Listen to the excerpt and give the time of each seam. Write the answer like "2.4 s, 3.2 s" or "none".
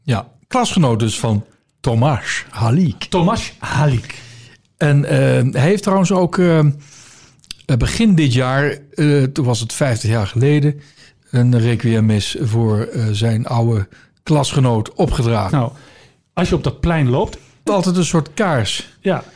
15.5 s, 17.7 s